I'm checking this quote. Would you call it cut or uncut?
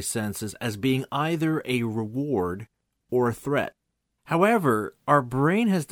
cut